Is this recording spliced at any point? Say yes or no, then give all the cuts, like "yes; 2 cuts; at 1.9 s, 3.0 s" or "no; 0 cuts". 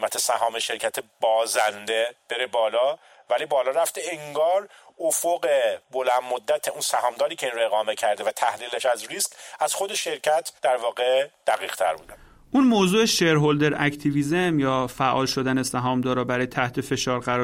yes; 2 cuts; at 5.8 s, 10.6 s